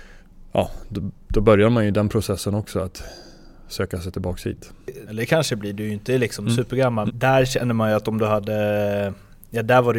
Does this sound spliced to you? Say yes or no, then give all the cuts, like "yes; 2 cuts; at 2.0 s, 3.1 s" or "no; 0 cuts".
yes; 2 cuts; at 5.1 s, 7.1 s